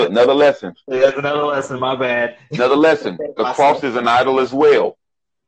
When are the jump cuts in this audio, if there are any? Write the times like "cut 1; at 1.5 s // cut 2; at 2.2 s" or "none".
none